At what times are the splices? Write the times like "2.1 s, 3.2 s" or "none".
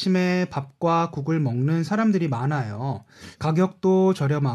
3.3 s